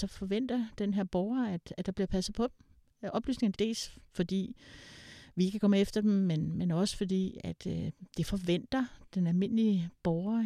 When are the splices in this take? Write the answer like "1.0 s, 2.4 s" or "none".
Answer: 3.5 s